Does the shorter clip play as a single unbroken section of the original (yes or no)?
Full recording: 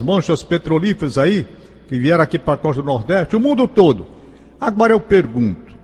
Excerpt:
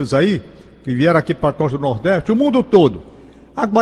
yes